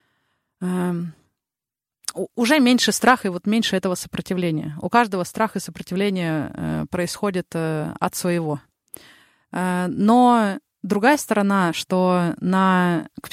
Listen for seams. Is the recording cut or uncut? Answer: uncut